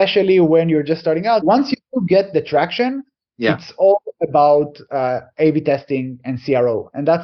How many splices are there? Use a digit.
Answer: 1